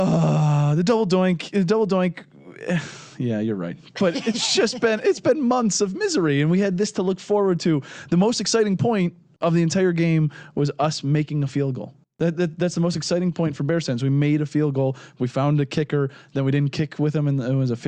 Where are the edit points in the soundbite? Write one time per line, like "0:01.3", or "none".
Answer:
none

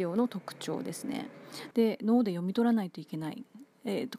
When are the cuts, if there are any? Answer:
0:01.7

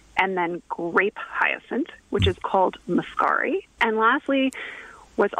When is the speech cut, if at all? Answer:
0:02.4
0:03.8

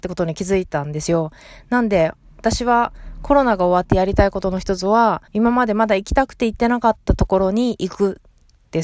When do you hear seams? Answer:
0:05.3

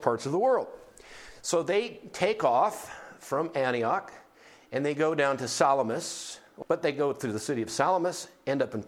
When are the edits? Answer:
0:06.6

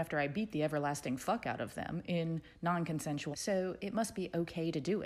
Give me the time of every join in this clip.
0:03.3

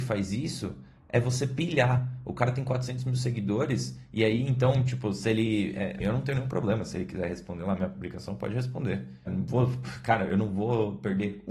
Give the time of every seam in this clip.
0:06.0
0:09.3

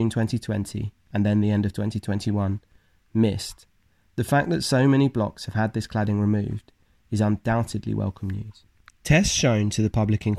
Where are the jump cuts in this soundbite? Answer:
none

